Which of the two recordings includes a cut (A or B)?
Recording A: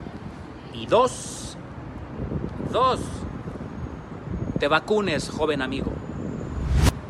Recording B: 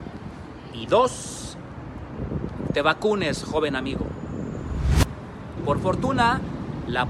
B